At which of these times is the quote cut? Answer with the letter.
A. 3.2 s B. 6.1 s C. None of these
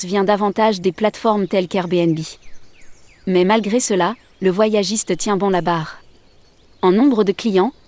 C